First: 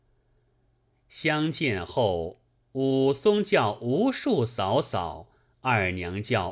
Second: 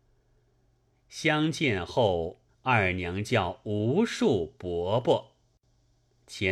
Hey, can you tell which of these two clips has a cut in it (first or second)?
second